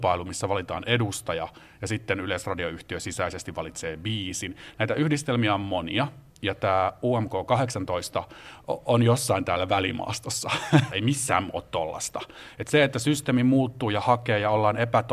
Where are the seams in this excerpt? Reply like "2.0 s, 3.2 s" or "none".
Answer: 10.9 s